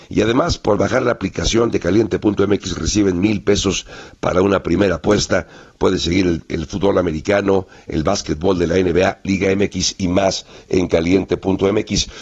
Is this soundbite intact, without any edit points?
yes; 0 cuts

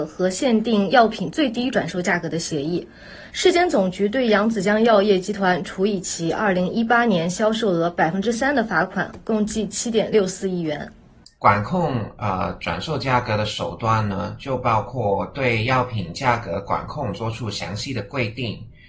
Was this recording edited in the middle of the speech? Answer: yes; 2 cuts; at 3.3 s, 11.4 s

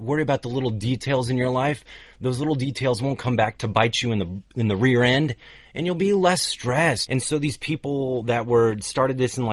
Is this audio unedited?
no; 1 cut; at 7.1 s

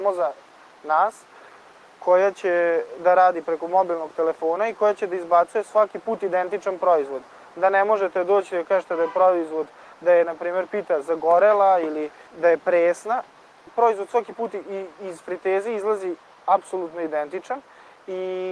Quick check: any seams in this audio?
no; 0 cuts

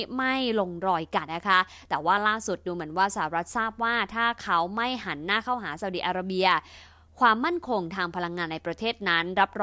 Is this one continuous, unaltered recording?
no; 1 cut; at 1.3 s

